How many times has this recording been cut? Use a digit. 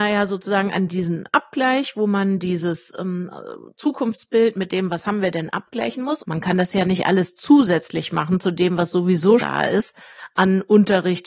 2